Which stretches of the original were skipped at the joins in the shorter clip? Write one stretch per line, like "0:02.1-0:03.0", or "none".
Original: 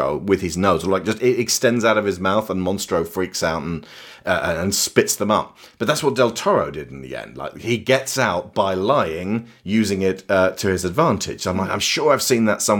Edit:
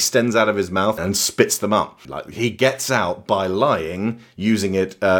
0:02.5-0:04.6
0:05.6-0:07.3

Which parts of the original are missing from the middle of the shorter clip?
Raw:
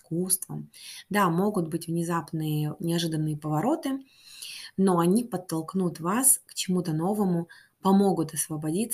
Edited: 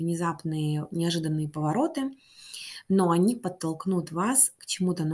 none

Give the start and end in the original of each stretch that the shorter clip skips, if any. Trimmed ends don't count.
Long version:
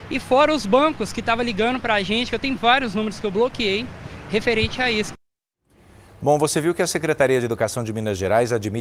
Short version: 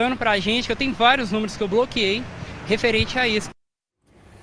none

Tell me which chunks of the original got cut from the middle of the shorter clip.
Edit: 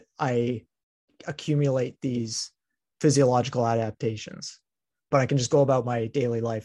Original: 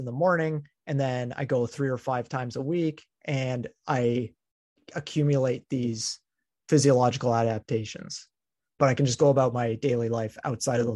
none

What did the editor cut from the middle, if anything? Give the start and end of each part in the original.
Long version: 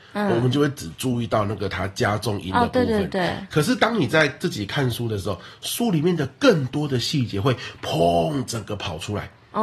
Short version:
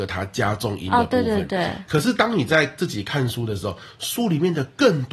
none

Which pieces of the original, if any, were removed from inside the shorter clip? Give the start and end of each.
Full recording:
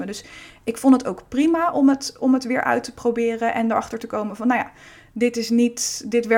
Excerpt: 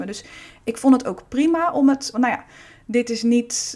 0:02.1-0:04.4

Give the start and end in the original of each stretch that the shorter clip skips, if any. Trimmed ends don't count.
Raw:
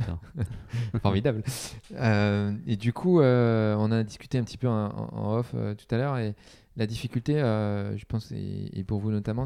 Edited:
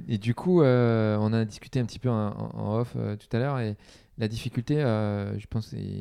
none

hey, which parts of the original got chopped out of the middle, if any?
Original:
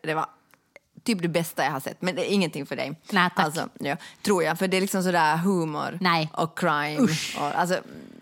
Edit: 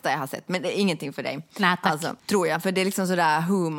0:03.7-0:04.2

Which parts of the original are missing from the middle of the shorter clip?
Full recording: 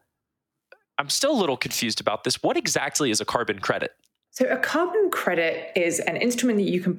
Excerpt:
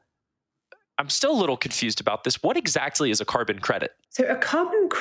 0:04.0-0:04.3

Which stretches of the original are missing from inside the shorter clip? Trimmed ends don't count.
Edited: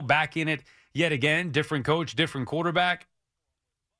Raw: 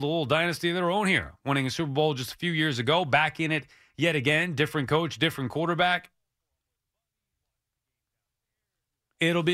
none

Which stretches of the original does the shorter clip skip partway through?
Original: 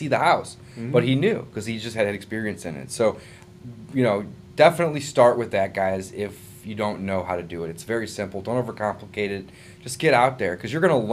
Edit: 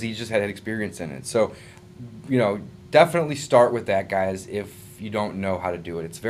none

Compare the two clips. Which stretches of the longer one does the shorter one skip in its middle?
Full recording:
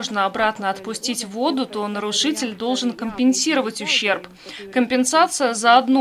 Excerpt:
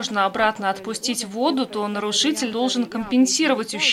0:02.5-0:02.6

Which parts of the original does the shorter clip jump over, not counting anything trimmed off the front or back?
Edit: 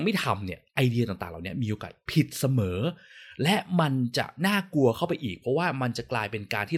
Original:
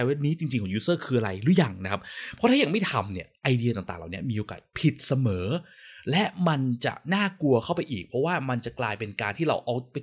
none

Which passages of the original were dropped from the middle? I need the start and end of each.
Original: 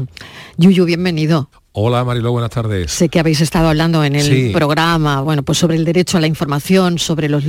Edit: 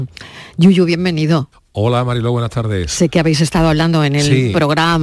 none

